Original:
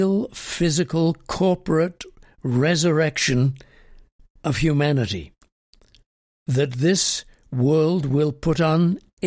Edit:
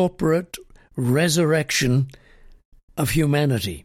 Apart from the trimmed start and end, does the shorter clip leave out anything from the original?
no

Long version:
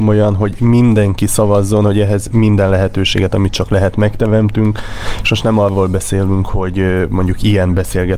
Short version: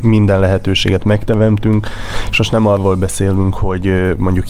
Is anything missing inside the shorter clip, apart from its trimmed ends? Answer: yes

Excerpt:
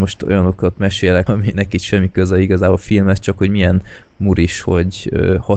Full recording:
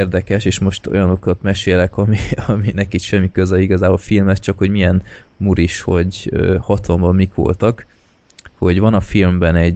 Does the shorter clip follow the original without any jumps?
no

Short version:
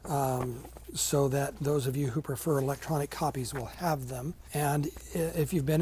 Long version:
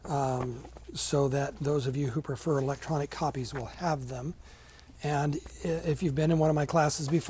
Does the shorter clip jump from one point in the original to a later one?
yes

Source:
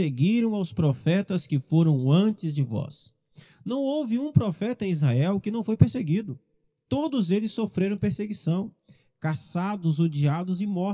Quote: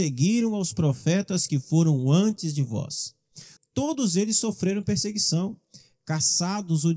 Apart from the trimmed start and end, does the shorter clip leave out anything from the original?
yes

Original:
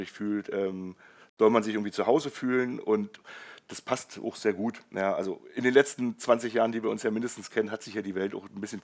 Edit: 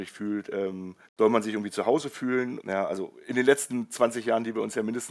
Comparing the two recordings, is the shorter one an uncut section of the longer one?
no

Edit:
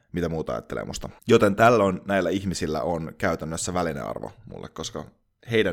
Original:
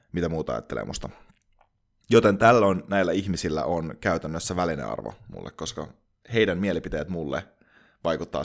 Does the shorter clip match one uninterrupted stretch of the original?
no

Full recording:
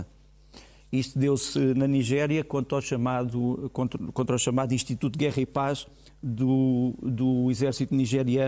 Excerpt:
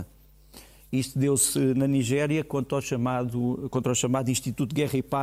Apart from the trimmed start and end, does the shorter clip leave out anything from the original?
yes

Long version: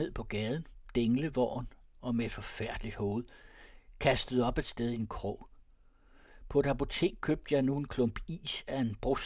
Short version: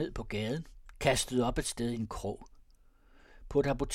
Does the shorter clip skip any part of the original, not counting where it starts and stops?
yes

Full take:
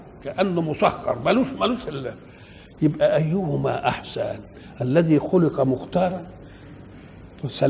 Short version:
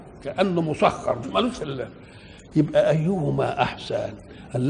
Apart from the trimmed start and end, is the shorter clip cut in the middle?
yes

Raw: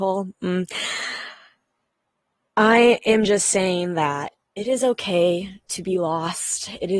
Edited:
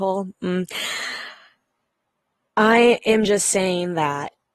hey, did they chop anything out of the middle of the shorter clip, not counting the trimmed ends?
no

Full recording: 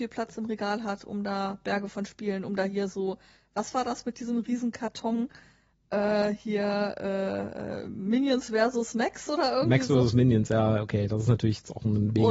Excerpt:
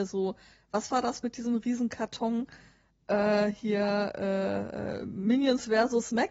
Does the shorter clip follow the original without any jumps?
yes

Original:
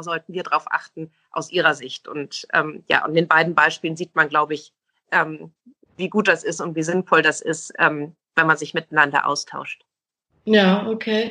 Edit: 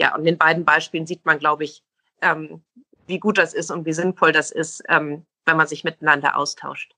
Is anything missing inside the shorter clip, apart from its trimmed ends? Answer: no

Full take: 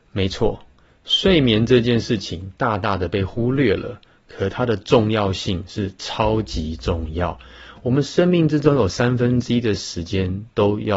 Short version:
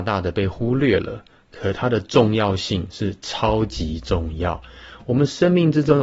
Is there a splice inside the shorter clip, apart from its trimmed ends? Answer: no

